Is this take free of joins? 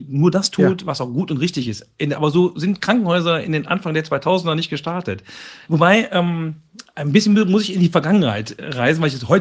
no; 1 cut; at 5.6 s

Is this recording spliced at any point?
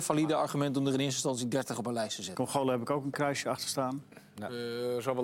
yes; 1 cut; at 2.3 s

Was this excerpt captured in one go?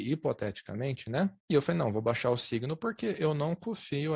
no; 1 cut; at 1.4 s

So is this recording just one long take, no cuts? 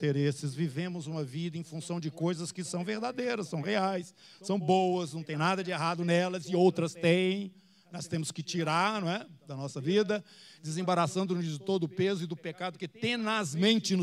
yes; 0 cuts

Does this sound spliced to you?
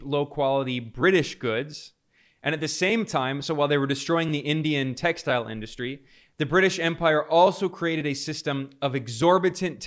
no; 0 cuts

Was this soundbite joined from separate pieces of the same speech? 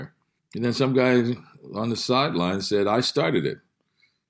no; 0 cuts

